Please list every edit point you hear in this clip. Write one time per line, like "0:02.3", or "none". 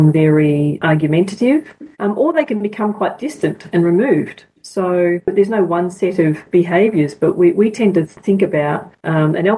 0:01.9